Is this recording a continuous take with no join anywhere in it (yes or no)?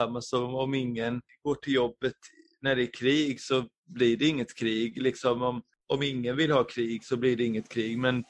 yes